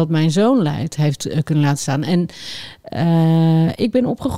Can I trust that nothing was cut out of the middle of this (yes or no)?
yes